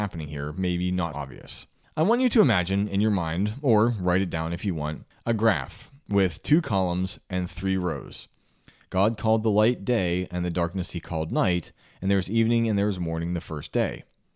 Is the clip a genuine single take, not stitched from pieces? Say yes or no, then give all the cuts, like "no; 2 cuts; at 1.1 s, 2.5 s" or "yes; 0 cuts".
no; 2 cuts; at 1.1 s, 8.8 s